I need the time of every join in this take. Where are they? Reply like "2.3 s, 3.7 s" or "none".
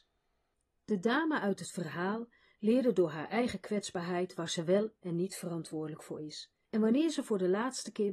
6.6 s